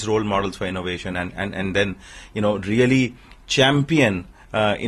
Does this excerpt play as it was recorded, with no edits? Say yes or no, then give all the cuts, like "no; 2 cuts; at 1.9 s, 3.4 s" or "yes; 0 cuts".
yes; 0 cuts